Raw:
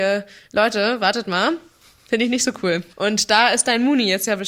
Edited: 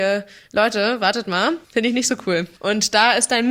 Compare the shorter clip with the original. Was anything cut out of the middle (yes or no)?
yes